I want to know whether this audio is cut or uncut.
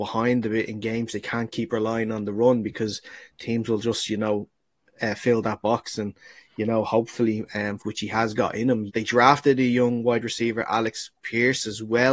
cut